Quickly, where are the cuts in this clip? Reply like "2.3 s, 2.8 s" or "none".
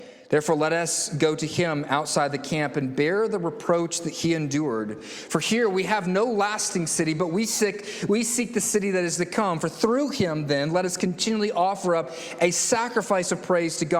none